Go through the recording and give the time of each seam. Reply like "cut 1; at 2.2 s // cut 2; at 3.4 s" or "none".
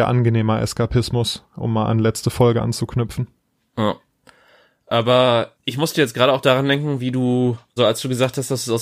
cut 1; at 5.5 s // cut 2; at 7.8 s